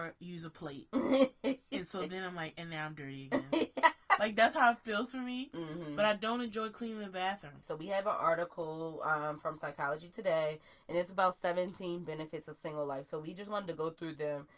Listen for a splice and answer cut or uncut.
cut